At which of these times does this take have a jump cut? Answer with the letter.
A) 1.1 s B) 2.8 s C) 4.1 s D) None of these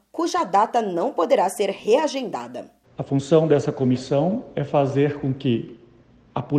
B